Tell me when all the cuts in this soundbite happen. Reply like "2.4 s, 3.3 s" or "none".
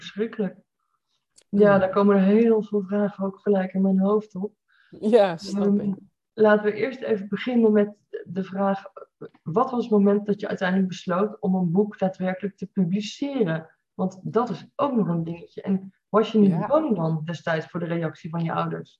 1.4 s